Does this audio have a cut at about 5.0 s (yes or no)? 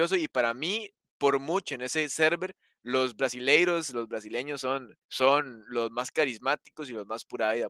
yes